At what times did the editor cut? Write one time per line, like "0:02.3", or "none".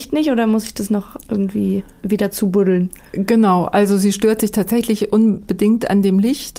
none